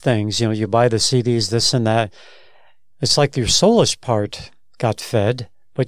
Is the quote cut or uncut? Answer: uncut